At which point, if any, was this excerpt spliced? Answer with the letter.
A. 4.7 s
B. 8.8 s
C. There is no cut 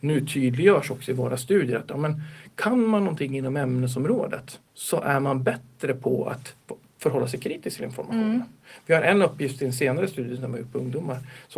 A